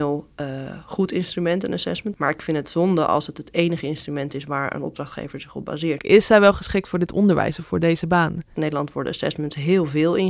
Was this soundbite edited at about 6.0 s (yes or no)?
yes